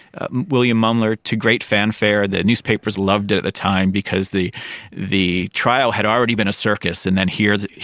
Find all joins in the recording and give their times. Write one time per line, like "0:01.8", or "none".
0:02.9